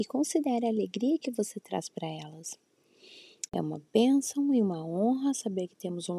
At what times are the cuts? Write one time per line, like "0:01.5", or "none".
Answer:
0:03.5